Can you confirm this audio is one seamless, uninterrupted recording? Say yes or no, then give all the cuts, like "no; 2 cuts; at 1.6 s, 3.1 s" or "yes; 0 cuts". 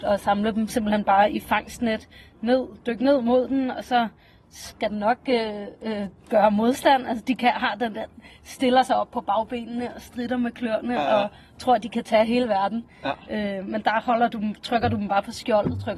yes; 0 cuts